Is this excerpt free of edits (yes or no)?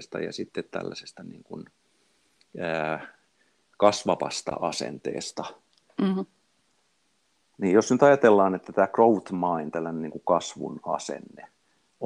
yes